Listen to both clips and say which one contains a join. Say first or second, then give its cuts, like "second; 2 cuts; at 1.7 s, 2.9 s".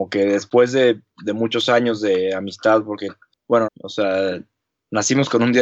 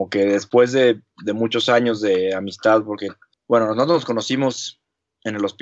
first; 1 cut; at 3.7 s